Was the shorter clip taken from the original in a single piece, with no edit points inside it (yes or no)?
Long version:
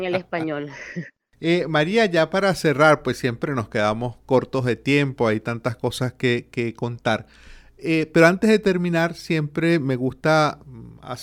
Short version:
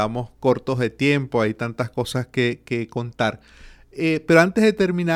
yes